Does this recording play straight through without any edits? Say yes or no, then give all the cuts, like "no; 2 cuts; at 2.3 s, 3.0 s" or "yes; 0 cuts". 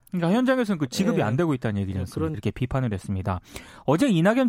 no; 1 cut; at 2.3 s